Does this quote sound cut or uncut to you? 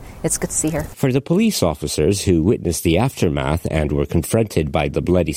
cut